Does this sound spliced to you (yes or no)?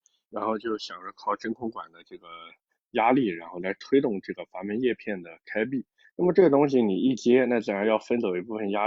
yes